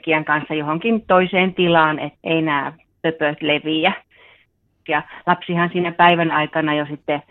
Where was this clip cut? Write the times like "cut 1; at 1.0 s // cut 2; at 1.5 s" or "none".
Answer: cut 1; at 2.2 s // cut 2; at 4.9 s